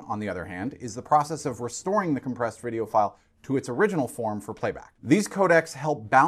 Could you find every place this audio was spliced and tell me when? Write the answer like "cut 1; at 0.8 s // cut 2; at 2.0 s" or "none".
cut 1; at 5.0 s